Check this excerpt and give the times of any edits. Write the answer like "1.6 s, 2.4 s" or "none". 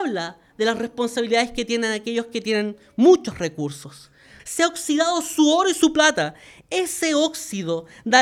4.4 s